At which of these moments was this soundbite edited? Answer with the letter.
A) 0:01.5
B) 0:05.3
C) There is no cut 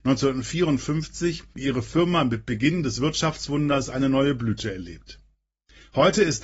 A